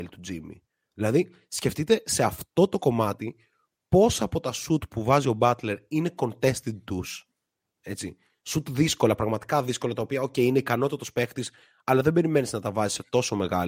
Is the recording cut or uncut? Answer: uncut